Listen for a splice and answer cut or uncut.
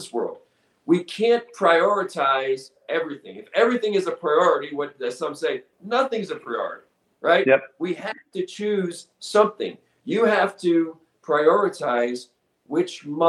cut